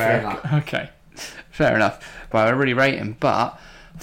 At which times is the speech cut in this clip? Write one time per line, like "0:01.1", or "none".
0:02.3

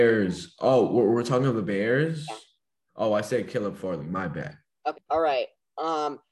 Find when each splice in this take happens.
0:04.9

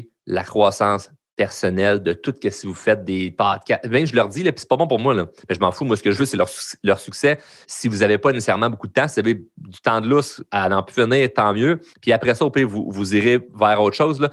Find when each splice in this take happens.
0:07.6
0:11.9

